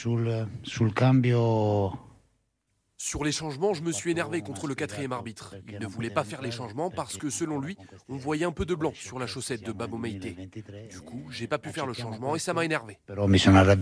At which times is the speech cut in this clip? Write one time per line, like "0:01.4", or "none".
none

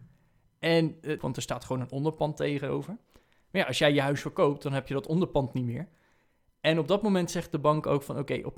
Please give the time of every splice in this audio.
0:01.2

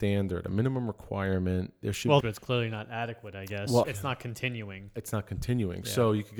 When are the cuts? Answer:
0:02.2
0:03.8

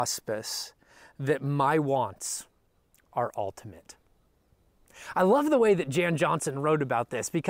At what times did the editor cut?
none

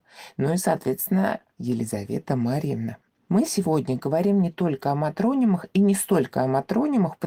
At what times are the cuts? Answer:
0:01.5

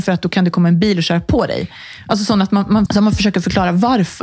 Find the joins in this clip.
0:02.9

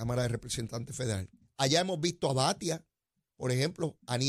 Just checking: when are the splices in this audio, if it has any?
0:01.4

